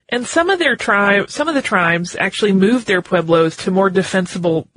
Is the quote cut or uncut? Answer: uncut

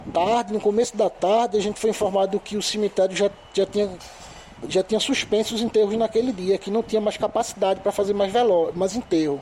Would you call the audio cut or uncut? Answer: uncut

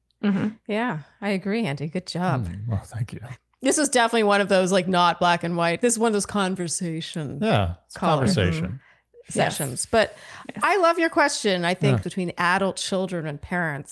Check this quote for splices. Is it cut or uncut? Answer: cut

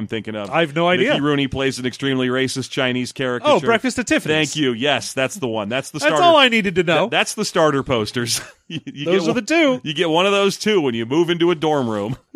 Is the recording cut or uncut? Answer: uncut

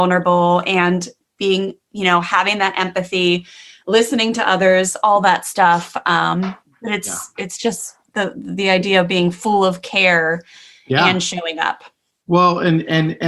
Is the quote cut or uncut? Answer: uncut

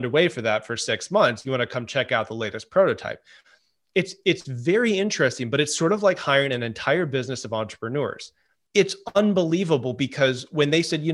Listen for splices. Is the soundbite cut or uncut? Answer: cut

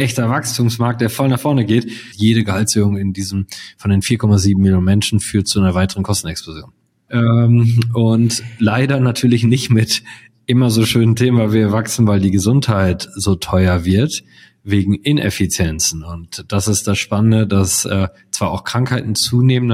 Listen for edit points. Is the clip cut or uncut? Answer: cut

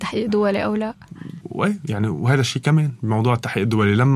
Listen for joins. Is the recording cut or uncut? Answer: cut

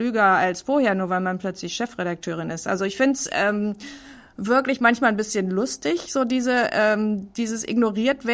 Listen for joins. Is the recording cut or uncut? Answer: uncut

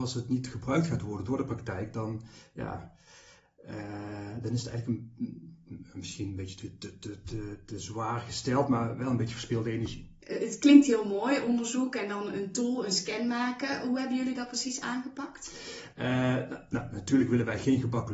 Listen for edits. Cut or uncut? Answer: uncut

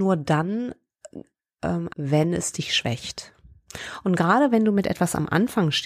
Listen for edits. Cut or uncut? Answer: cut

